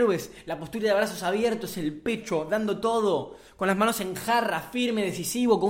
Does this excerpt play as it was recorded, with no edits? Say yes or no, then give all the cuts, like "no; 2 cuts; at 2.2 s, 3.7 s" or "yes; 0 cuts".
yes; 0 cuts